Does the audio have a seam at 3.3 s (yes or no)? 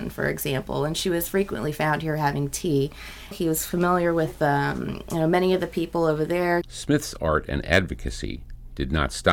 yes